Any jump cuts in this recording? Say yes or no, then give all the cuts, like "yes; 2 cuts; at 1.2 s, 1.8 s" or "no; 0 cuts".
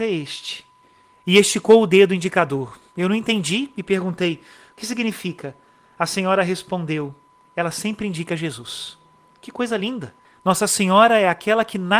no; 0 cuts